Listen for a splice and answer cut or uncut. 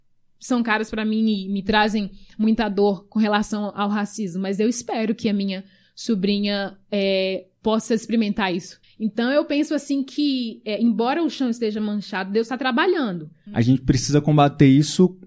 cut